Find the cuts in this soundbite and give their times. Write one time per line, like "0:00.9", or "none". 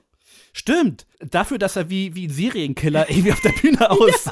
0:01.1